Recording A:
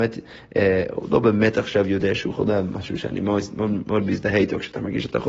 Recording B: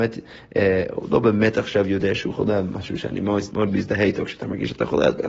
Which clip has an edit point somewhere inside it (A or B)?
B